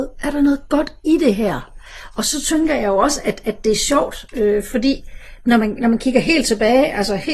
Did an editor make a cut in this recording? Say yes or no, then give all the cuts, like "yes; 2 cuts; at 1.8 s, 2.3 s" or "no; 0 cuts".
no; 0 cuts